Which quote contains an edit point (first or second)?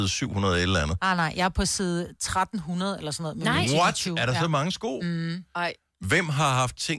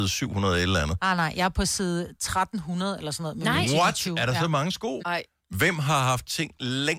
second